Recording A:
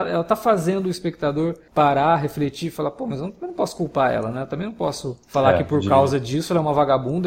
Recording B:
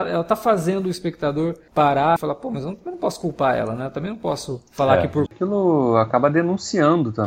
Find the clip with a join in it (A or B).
B